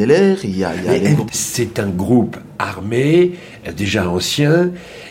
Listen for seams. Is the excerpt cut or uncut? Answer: cut